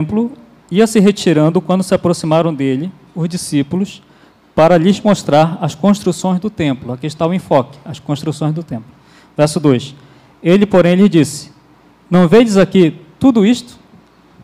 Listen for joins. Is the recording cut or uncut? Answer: uncut